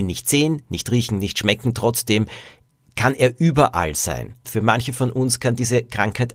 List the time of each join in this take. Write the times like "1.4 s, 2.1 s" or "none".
4.4 s